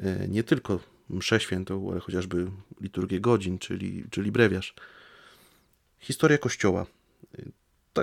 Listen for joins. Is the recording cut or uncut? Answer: uncut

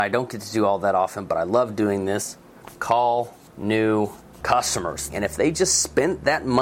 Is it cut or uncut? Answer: cut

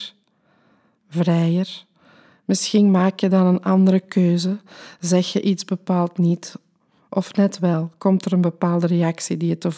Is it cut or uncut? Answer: uncut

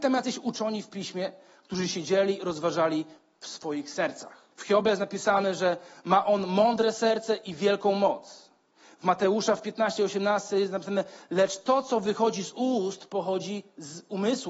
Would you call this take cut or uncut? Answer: cut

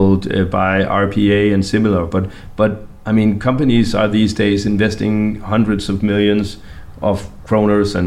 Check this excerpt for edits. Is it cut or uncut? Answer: uncut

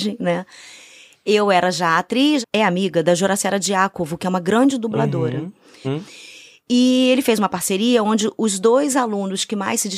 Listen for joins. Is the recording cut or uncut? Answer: cut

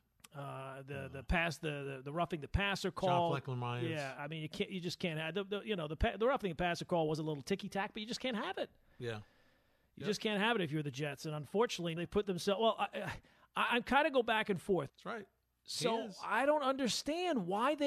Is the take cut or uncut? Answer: cut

